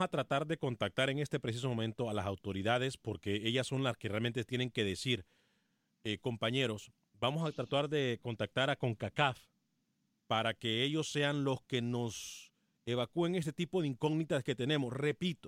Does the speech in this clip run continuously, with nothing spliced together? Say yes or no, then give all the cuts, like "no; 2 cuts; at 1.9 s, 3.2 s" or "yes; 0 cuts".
yes; 0 cuts